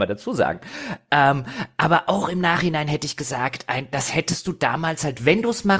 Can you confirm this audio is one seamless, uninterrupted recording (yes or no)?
yes